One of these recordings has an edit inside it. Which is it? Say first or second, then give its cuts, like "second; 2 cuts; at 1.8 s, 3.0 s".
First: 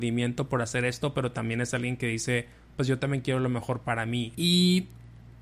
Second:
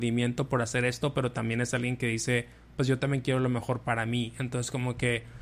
first; 1 cut; at 4.3 s